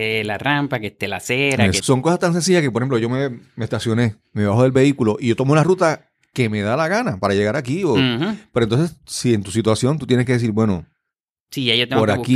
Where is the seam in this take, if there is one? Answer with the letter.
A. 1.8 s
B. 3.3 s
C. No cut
A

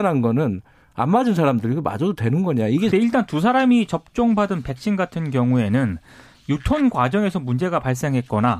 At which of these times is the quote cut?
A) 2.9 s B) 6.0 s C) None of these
A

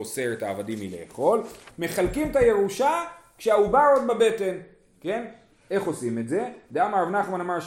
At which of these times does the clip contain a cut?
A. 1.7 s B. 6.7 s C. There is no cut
A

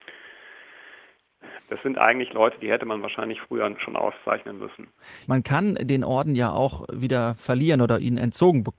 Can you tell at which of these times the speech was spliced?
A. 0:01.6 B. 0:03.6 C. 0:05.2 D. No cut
A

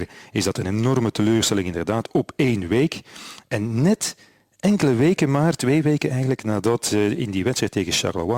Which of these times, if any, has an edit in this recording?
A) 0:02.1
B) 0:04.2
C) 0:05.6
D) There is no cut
D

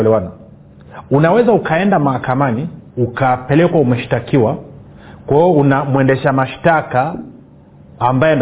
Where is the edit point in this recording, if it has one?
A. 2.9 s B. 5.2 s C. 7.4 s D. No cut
A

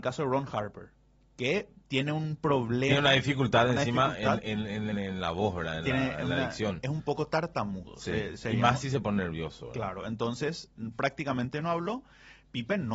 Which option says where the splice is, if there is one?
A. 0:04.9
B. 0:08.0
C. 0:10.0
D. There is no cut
A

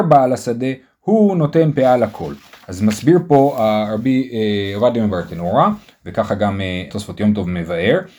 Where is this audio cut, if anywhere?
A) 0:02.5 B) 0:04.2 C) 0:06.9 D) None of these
C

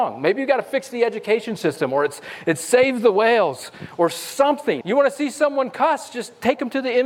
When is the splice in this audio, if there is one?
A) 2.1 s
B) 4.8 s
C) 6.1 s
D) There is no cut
B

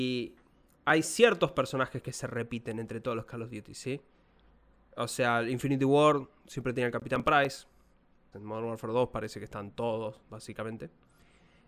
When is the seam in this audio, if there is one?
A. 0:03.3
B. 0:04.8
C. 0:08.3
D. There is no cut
C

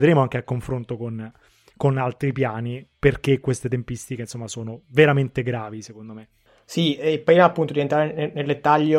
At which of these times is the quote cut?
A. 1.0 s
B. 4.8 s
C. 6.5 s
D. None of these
D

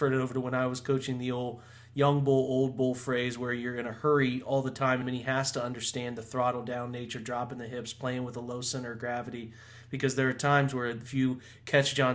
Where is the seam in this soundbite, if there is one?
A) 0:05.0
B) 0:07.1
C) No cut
A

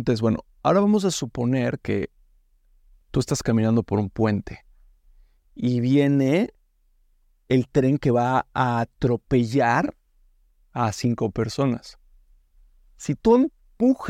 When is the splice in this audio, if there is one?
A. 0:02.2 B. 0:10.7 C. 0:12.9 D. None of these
D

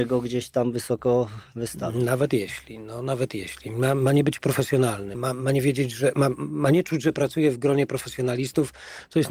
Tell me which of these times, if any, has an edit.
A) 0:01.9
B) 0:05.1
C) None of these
B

